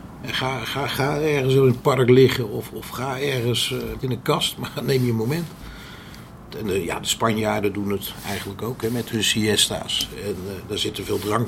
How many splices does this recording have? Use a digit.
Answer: 2